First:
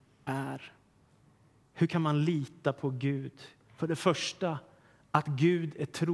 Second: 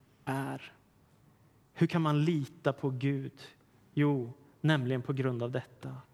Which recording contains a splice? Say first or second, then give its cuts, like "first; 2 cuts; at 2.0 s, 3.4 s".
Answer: first; 1 cut; at 3.6 s